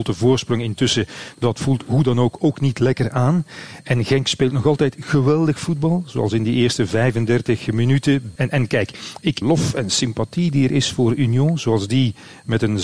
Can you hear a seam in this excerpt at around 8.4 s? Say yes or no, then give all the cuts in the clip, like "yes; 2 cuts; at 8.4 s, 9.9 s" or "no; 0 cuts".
yes; 2 cuts; at 8.4 s, 9.4 s